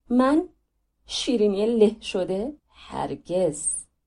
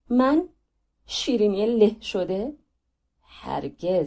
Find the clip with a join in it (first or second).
first